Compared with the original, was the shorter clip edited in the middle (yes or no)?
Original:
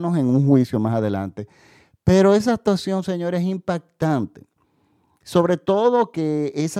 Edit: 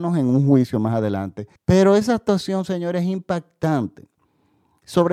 yes